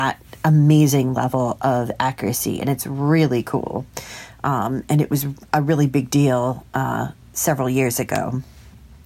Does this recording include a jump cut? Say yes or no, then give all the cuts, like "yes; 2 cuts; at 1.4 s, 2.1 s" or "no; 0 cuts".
no; 0 cuts